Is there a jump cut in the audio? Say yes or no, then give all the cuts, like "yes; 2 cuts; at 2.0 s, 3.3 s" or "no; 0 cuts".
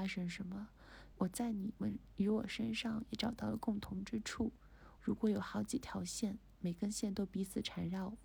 yes; 2 cuts; at 1.1 s, 5.0 s